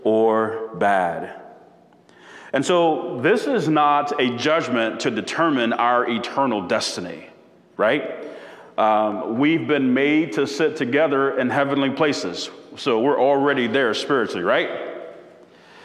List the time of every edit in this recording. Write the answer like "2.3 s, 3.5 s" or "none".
none